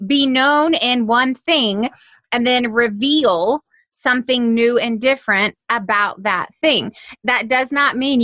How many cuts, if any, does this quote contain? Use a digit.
0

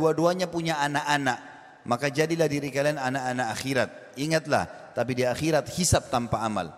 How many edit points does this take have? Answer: 1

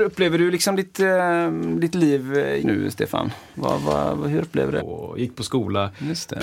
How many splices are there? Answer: 2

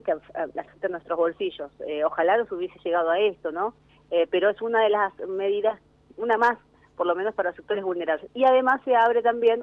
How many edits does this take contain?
0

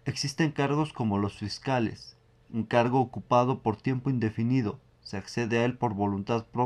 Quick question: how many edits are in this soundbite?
1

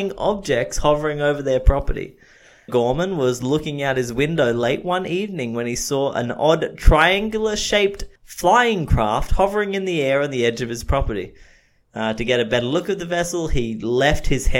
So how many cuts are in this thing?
2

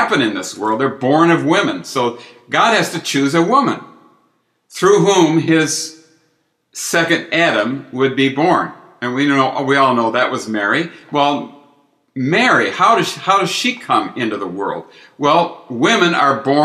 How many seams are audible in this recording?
0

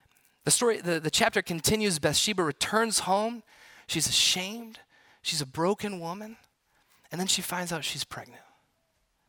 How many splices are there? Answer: 0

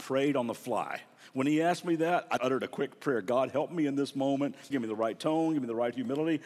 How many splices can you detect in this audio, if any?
2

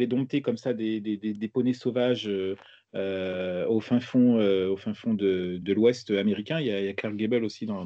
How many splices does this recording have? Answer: 1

